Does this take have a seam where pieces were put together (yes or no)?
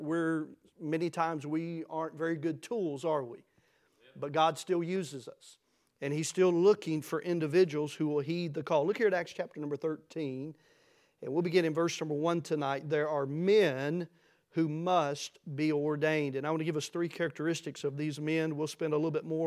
no